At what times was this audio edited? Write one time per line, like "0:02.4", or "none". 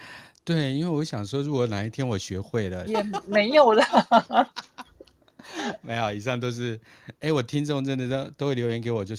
0:02.9

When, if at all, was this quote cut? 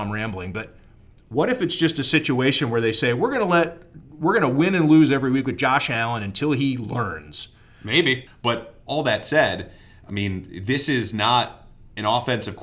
0:08.3

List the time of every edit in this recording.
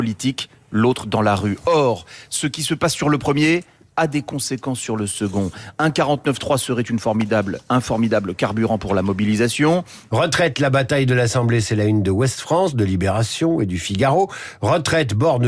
0:10.1

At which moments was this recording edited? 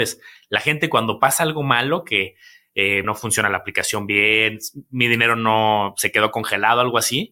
0:03.0

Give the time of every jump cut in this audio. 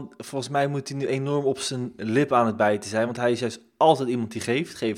none

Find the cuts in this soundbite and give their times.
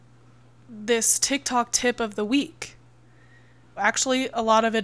0:03.8

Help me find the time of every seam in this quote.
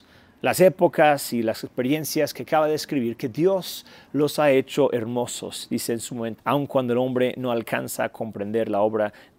0:06.4

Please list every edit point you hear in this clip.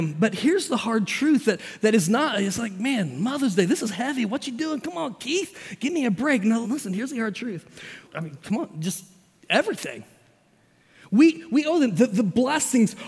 0:06.6
0:08.0

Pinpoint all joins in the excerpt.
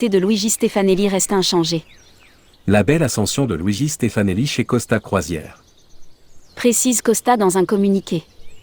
0:02.5
0:06.5

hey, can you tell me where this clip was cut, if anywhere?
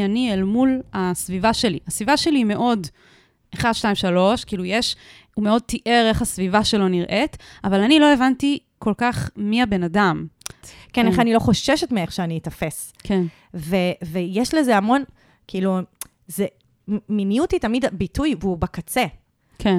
0:10.6

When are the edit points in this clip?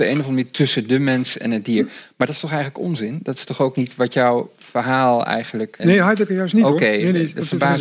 0:05.8

